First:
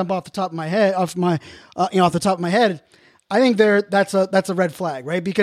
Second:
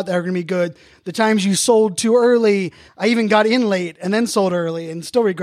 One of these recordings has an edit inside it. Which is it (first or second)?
second